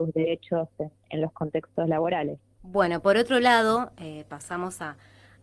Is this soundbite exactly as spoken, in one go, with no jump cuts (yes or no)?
no